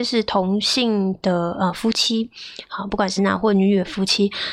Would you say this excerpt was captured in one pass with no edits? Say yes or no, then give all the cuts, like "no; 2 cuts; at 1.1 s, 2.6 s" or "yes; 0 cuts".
no; 1 cut; at 3.2 s